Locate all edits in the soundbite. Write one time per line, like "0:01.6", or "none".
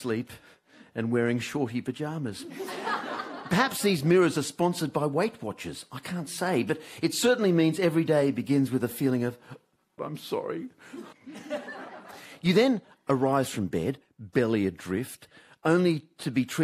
0:10.0
0:11.1
0:14.0